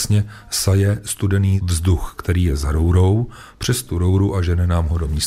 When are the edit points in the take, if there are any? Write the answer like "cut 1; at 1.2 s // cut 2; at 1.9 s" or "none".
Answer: none